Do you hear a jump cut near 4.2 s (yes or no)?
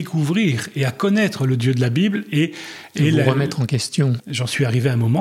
yes